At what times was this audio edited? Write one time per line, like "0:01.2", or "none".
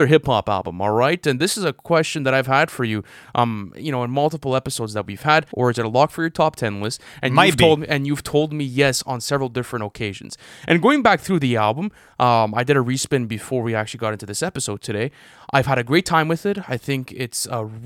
0:05.5